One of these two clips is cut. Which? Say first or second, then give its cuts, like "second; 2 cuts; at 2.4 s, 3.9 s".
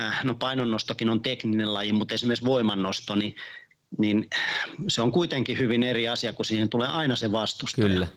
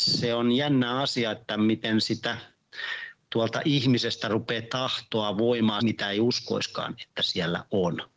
second; 1 cut; at 5.8 s